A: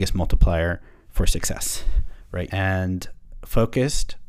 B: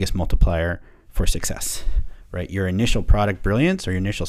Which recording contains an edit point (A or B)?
A